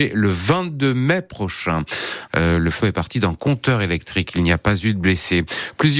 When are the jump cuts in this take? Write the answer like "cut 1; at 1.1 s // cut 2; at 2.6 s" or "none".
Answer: cut 1; at 2.3 s